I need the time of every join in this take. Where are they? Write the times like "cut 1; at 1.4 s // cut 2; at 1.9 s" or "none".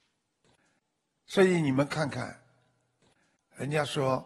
none